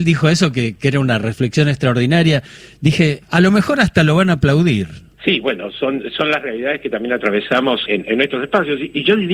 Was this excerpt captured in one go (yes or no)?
no